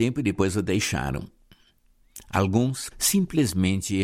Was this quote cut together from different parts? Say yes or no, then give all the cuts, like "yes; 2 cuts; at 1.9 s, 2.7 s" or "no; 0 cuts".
yes; 1 cut; at 2.9 s